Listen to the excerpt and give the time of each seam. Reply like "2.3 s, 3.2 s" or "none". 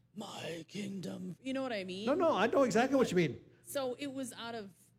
none